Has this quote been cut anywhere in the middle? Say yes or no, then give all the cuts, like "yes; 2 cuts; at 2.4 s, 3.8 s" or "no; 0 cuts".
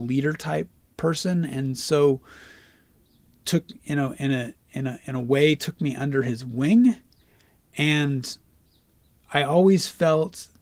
no; 0 cuts